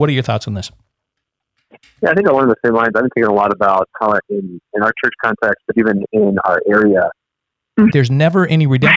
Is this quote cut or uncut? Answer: cut